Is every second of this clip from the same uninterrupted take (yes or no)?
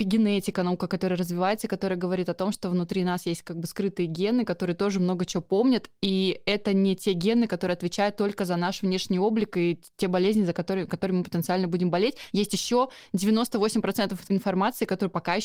yes